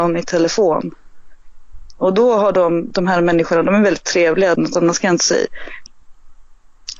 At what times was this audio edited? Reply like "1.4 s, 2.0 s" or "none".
2.9 s, 4.6 s, 5.9 s

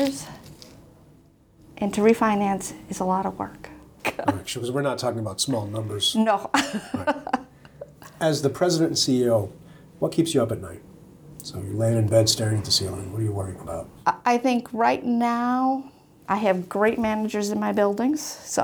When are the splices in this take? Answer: none

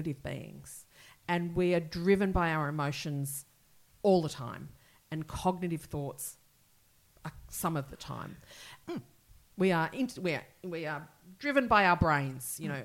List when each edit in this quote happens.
8.8 s

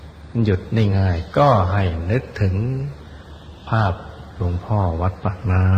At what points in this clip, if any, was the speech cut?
0.9 s

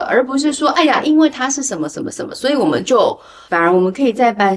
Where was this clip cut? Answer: 3.5 s

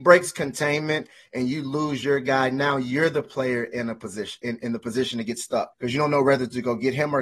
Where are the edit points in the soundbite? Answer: 4.6 s, 5.7 s

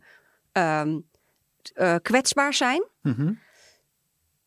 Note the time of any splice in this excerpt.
1.7 s

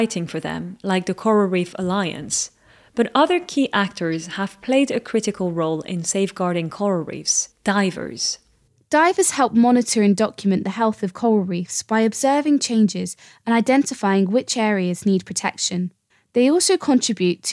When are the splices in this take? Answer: none

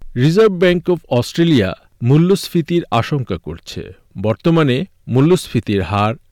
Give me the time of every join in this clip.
none

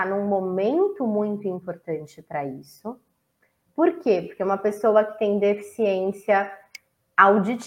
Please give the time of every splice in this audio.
none

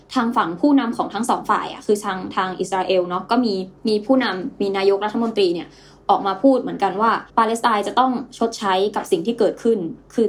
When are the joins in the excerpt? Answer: 3.8 s, 7.3 s

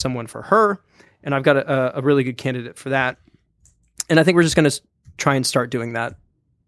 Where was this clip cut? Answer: none

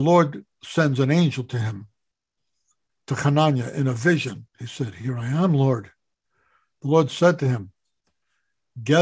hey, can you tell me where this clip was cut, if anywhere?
4.5 s

